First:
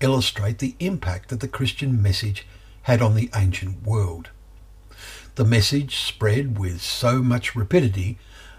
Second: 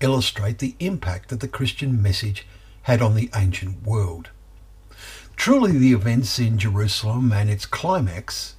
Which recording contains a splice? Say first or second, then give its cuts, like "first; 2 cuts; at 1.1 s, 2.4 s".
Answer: second; 1 cut; at 5.3 s